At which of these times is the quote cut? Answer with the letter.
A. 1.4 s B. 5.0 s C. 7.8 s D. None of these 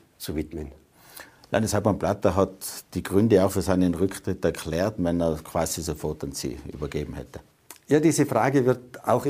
B